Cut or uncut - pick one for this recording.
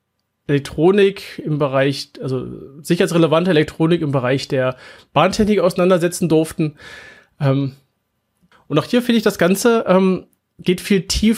cut